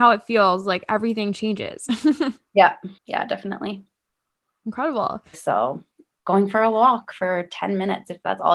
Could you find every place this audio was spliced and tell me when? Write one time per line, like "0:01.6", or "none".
0:03.0
0:05.3